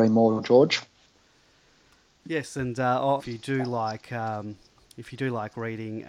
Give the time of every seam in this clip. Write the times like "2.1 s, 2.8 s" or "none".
3.2 s